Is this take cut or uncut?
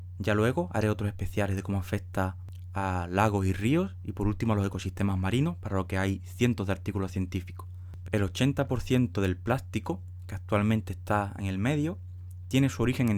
cut